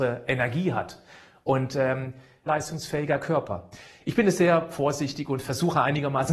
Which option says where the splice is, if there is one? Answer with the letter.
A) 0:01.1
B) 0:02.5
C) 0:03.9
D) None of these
B